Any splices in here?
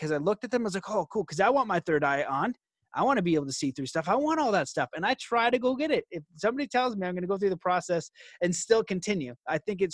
no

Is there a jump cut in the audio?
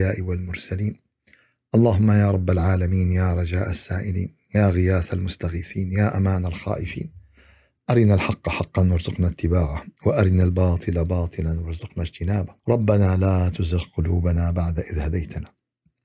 yes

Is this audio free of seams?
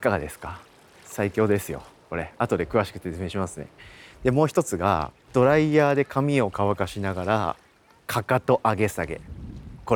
no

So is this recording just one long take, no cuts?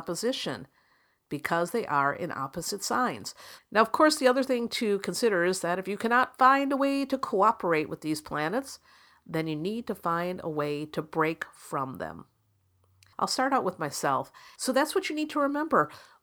no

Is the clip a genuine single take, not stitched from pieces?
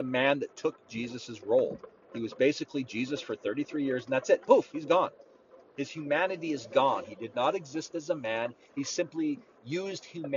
yes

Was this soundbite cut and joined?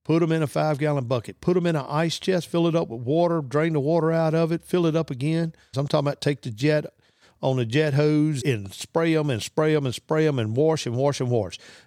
yes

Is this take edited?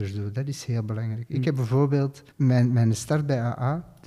yes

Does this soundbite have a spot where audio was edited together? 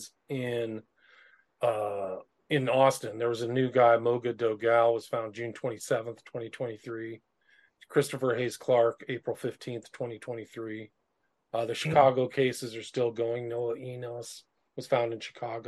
no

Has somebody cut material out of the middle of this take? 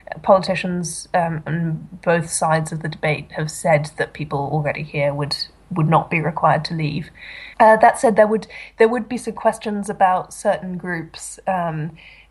yes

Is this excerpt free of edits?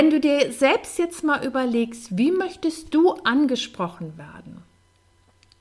yes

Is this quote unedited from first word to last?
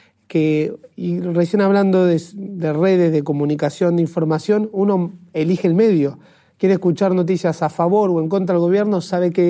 yes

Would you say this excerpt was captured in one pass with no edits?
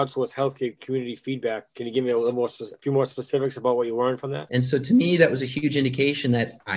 no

